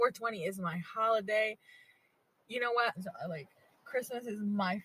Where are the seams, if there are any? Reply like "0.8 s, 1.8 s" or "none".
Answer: 2.9 s